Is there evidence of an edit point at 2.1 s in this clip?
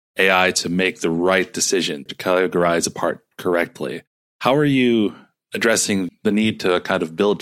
yes; 2 cuts; at 2.1 s, 6.1 s

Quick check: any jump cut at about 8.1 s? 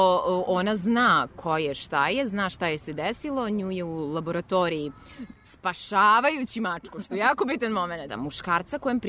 yes; 1 cut; at 8.1 s

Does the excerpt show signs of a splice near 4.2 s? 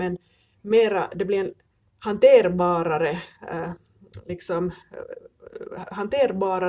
no; 0 cuts

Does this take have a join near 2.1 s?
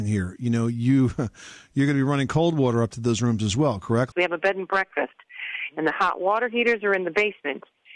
no; 1 cut; at 4.1 s

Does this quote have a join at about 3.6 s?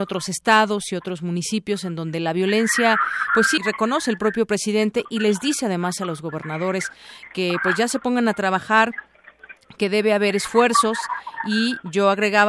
yes; 1 cut; at 3.6 s

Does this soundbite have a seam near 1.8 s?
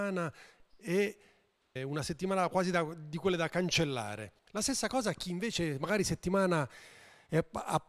yes; 2 cuts; at 1.8 s, 4.4 s

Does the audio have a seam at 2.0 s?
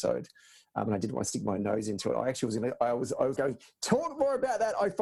no; 1 cut; at 3.4 s

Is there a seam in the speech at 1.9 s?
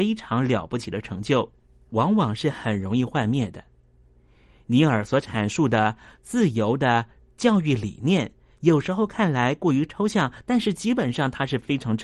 yes; 1 cut; at 1.9 s

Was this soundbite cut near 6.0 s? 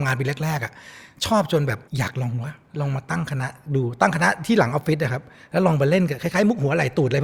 no; 1 cut; at 1.9 s

